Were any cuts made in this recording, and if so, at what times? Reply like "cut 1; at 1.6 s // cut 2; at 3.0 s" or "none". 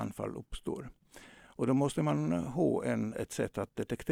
cut 1; at 3.1 s